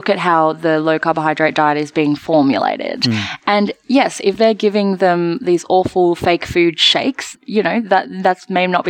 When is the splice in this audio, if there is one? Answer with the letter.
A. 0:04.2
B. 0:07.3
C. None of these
B